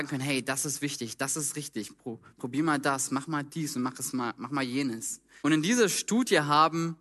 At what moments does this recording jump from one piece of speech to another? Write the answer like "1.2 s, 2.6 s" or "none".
5.4 s